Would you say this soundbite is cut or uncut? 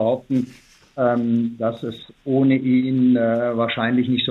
uncut